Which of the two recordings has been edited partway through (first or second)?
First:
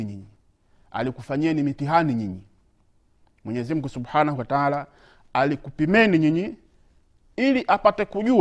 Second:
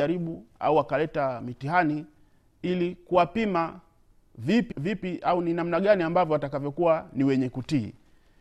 second